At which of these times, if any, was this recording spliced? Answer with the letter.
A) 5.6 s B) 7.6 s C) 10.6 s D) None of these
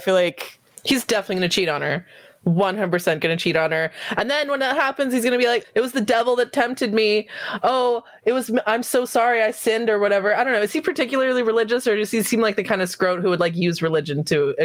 A